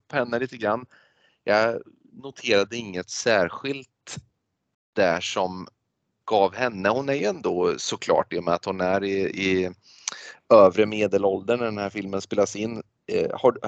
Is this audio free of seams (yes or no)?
yes